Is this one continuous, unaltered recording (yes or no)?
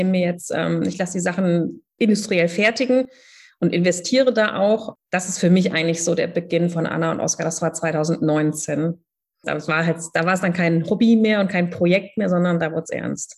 no